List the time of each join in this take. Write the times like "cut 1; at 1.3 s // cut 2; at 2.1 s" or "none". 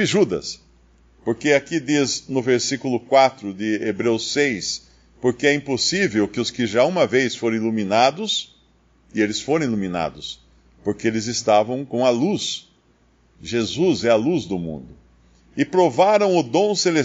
none